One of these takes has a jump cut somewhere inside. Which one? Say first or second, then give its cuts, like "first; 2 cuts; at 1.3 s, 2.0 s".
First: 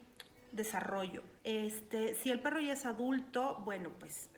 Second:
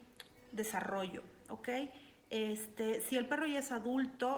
first; 1 cut; at 1.4 s